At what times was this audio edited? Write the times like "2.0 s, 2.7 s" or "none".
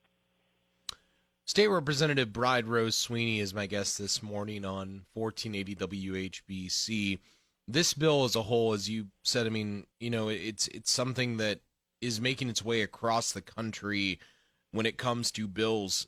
9.9 s